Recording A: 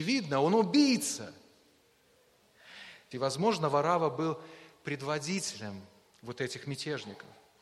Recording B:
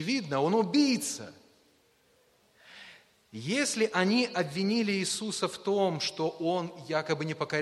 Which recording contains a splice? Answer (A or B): A